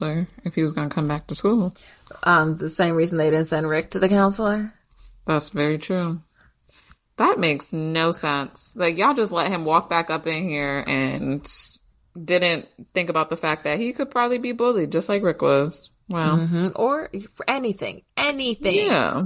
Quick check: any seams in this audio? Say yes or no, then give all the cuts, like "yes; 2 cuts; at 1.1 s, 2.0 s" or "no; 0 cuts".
no; 0 cuts